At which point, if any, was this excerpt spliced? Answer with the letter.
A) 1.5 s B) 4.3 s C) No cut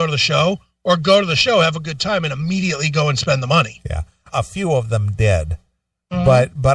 B